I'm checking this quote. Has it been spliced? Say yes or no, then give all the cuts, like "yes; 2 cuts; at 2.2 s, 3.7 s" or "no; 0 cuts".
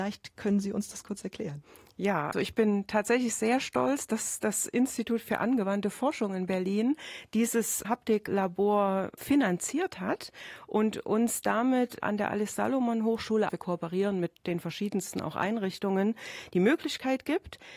yes; 2 cuts; at 2.3 s, 13.5 s